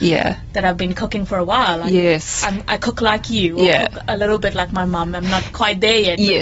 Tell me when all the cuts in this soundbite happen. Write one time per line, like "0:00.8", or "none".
none